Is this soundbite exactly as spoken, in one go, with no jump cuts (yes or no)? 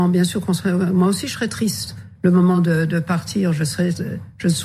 yes